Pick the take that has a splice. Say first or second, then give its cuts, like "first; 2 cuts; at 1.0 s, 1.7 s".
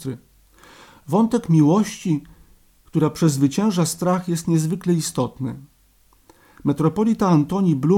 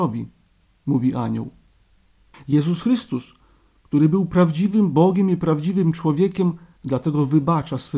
second; 2 cuts; at 2.3 s, 6.8 s